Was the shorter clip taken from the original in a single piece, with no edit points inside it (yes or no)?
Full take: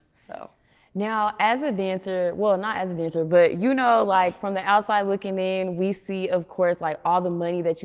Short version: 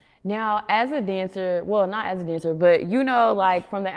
yes